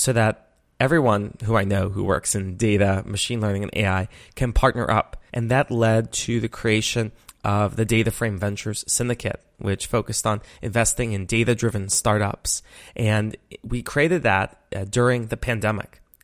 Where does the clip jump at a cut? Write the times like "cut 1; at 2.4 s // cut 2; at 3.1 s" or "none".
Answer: cut 1; at 5.3 s